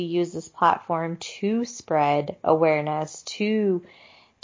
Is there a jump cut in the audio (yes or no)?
no